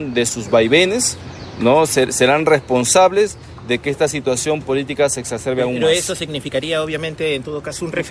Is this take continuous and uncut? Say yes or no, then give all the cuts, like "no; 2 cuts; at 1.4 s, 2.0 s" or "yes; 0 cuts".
yes; 0 cuts